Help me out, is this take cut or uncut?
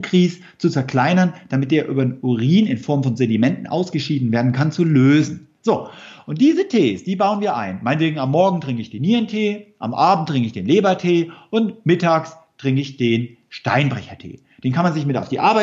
uncut